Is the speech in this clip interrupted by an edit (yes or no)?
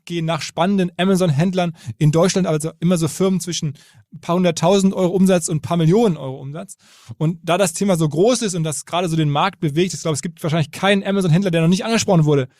no